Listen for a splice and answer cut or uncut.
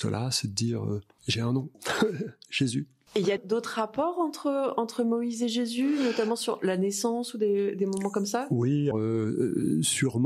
cut